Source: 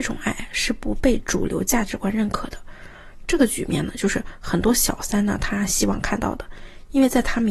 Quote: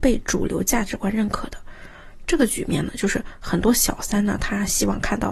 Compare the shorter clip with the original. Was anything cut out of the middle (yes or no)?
no